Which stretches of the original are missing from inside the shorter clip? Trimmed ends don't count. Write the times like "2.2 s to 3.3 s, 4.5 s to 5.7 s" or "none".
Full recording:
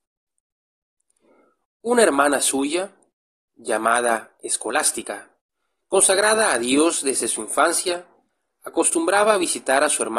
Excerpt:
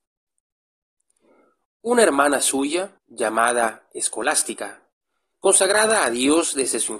3.0 s to 3.5 s